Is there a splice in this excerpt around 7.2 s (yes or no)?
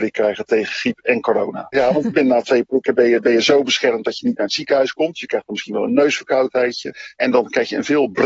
yes